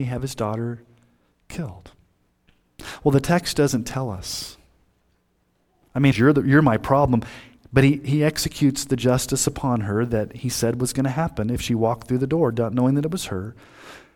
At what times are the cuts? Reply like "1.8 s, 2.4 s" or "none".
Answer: 6.1 s